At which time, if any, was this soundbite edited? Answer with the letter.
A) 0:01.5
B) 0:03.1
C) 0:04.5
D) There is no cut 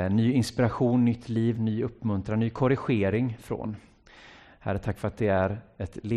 A